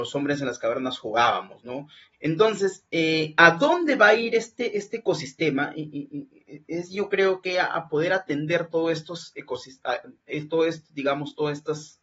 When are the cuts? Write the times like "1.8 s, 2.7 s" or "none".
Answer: 2.1 s